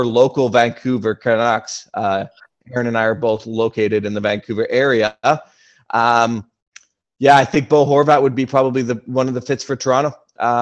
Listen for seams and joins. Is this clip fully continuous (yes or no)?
yes